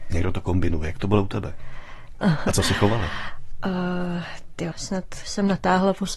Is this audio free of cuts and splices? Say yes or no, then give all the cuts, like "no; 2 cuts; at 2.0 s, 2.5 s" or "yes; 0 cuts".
no; 2 cuts; at 2.2 s, 4.7 s